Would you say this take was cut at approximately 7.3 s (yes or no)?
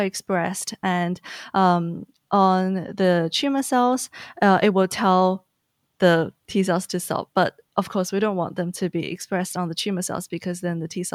no